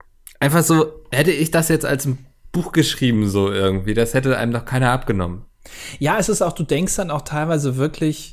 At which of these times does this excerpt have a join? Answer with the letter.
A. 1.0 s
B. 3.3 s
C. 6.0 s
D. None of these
D